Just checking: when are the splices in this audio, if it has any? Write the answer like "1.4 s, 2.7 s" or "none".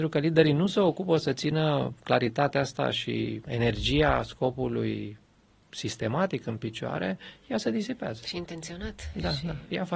3.5 s